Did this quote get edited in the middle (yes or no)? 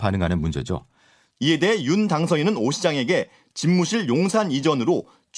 yes